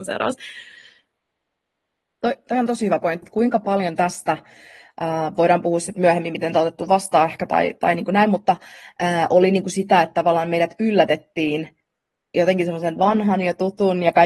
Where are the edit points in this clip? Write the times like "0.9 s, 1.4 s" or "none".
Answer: 3.2 s